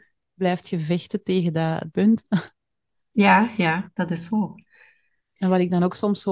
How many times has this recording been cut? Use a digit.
2